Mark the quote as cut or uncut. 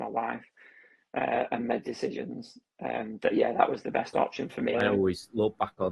cut